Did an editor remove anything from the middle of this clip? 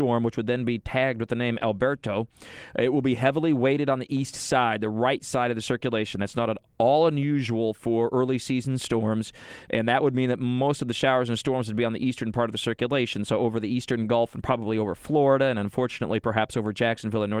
no; 0 cuts

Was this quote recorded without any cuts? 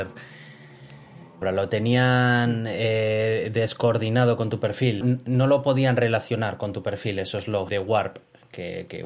no; 3 cuts; at 1.4 s, 5.0 s, 7.7 s

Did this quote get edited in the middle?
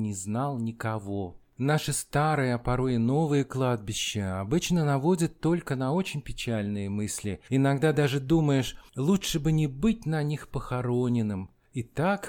no; 0 cuts

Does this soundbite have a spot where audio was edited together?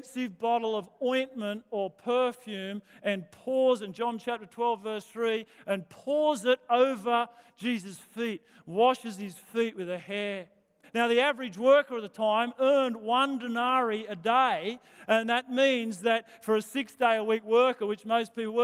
yes; 1 cut; at 10.8 s

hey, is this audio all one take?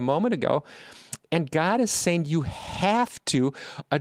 yes; 0 cuts

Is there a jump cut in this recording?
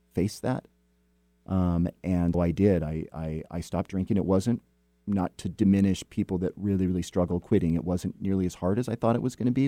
yes; 1 cut; at 2.3 s

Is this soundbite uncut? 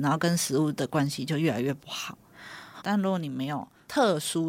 no; 1 cut; at 2.8 s

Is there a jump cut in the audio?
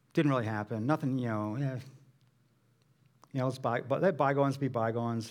no; 0 cuts

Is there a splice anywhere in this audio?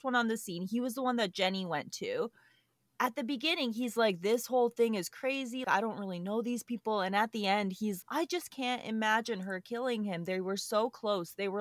yes; 2 cuts; at 5.6 s, 8.0 s

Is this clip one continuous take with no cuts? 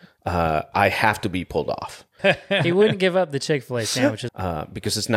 no; 2 cuts; at 2.2 s, 4.3 s

